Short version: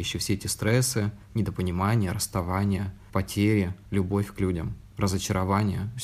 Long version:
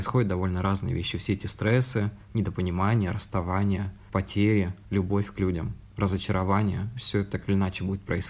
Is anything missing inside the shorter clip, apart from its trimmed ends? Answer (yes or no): no